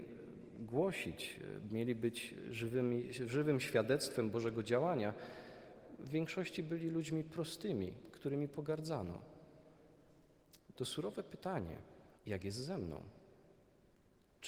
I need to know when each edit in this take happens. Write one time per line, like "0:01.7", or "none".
0:10.8
0:12.2